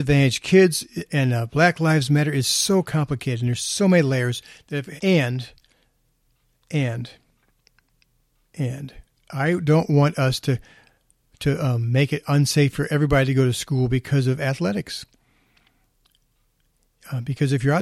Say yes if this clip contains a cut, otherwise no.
yes